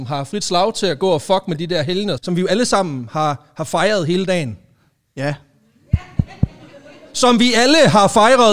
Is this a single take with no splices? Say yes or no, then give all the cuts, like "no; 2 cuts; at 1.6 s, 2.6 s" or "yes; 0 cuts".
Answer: no; 1 cut; at 2.2 s